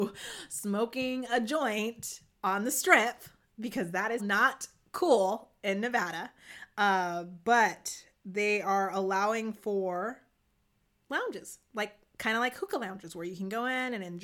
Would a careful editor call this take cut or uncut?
cut